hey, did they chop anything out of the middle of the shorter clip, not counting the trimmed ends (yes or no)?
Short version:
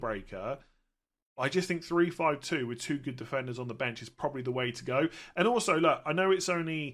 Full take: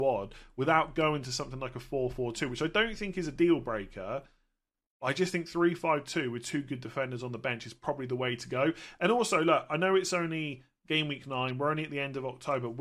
no